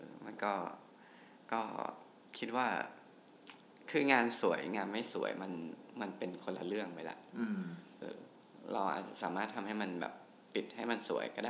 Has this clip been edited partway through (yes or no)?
yes